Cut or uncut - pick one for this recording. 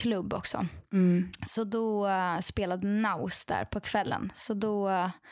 uncut